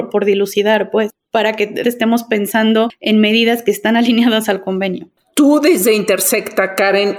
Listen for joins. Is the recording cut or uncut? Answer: cut